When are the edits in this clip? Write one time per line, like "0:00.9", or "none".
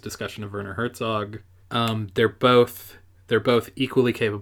0:01.6